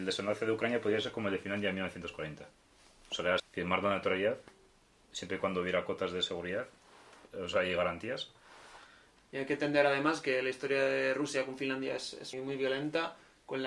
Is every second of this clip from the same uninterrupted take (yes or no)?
no